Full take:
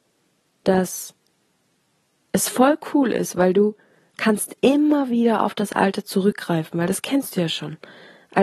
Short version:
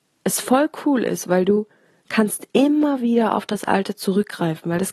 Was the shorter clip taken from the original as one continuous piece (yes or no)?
yes